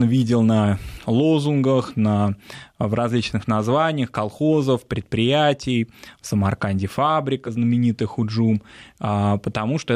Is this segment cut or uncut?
uncut